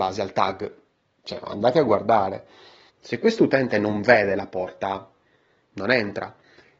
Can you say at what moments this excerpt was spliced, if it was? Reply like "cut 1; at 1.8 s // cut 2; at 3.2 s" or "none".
cut 1; at 1.2 s // cut 2; at 2.9 s